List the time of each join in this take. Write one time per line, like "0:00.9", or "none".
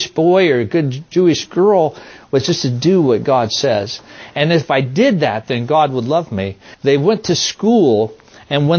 0:06.7